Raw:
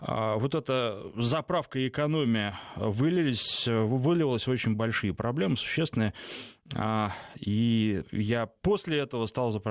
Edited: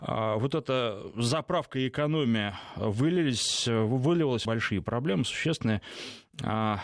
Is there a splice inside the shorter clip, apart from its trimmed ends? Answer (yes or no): yes